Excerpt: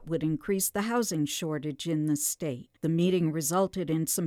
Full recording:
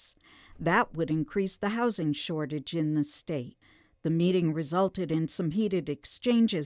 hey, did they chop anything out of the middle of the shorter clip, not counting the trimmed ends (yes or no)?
yes